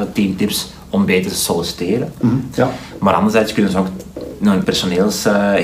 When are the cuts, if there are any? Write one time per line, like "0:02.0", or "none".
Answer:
0:02.5
0:04.6